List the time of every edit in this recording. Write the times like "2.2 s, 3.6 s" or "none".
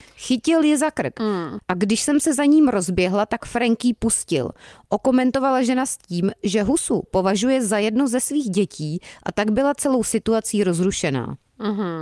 1.6 s